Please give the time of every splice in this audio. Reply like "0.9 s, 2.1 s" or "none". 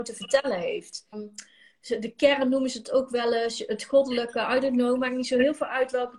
1.1 s